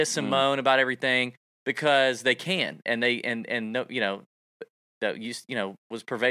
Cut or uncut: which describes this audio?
cut